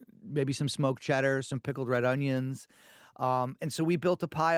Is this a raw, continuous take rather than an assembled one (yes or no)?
yes